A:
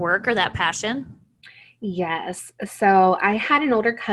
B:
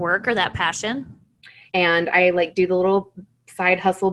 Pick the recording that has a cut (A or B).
B